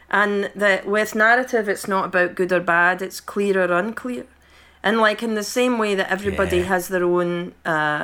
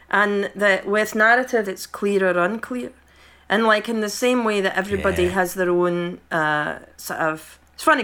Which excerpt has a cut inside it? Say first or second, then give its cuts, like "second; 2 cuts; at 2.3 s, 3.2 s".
second; 1 cut; at 1.6 s